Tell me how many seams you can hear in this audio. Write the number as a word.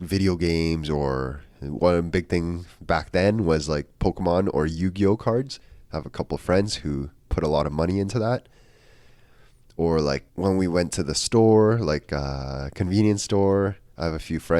one